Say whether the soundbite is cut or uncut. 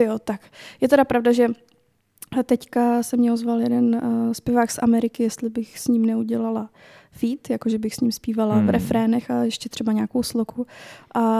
uncut